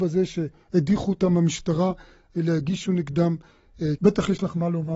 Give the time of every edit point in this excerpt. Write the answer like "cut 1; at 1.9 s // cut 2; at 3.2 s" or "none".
cut 1; at 4.0 s